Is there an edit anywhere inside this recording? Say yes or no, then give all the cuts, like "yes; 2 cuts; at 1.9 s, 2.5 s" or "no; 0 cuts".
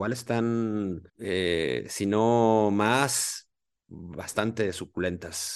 yes; 1 cut; at 1.1 s